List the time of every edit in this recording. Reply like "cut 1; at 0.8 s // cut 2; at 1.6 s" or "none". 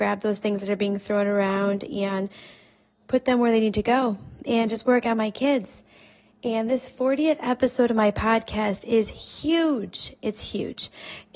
none